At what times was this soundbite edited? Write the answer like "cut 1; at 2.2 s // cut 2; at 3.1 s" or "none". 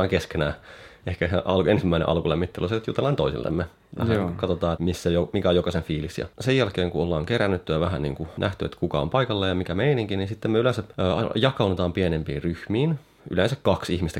cut 1; at 4.8 s